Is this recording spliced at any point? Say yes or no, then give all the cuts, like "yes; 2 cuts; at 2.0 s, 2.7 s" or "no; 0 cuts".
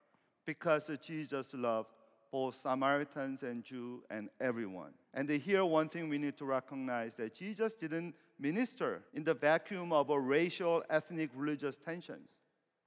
yes; 2 cuts; at 5.0 s, 9.1 s